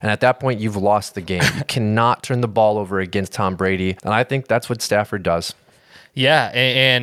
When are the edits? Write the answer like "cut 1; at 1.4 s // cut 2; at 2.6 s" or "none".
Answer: cut 1; at 4.0 s